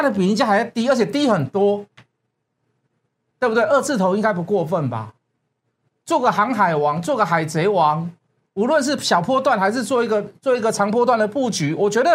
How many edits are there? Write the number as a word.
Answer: one